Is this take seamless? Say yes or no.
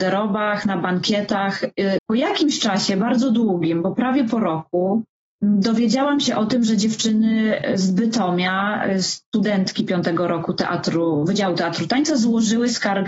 no